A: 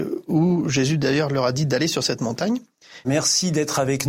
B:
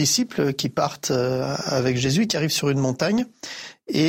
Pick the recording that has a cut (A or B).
A